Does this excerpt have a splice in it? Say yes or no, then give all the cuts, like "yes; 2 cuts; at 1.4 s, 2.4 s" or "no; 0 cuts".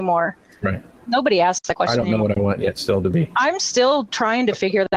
no; 0 cuts